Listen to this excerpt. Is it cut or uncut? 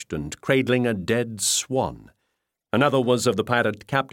cut